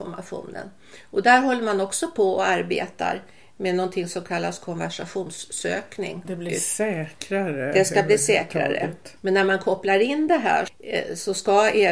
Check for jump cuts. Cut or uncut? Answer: cut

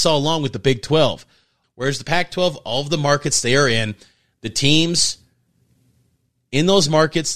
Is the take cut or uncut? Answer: cut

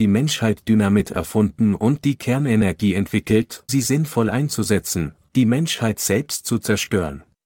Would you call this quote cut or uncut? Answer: cut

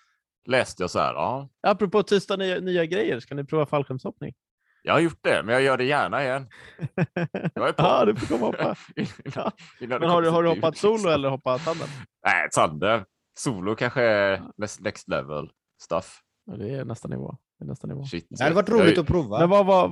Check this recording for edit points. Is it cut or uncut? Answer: uncut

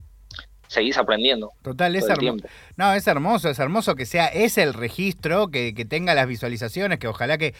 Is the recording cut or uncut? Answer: uncut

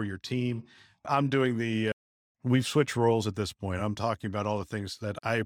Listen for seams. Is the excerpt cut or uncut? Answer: uncut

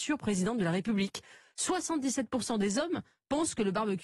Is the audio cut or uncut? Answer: uncut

